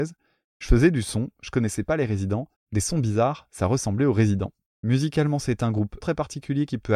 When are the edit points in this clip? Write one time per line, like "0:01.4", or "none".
0:04.7
0:06.0